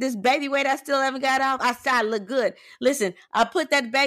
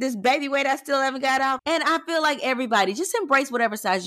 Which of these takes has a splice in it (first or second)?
second